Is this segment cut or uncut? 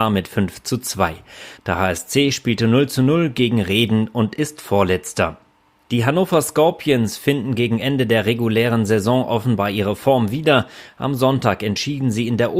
cut